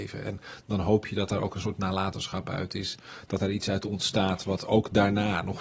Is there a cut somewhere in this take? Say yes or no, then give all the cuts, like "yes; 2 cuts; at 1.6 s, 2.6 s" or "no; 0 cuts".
no; 0 cuts